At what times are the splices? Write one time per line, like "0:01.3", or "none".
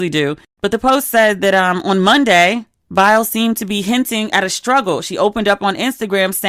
none